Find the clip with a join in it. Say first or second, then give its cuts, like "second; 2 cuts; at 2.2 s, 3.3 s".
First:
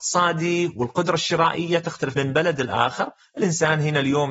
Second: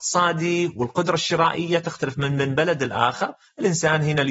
first; 1 cut; at 2.2 s